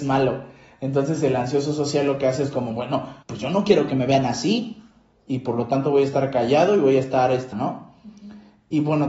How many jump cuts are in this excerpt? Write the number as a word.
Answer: two